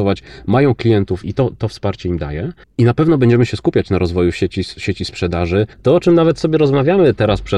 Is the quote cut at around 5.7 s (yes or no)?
yes